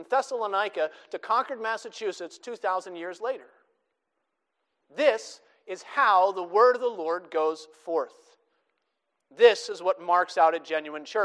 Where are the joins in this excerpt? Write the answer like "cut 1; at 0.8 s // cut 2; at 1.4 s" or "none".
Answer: none